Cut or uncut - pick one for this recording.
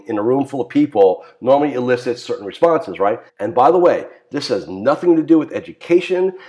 cut